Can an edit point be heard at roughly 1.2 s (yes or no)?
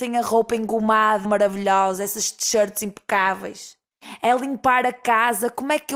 yes